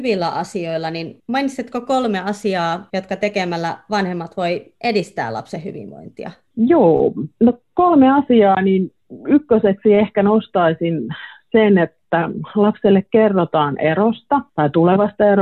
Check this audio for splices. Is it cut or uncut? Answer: cut